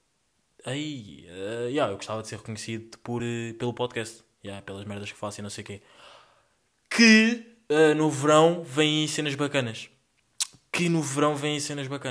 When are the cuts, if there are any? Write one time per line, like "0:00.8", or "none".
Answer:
none